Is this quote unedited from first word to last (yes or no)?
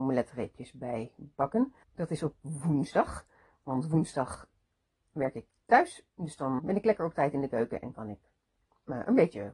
no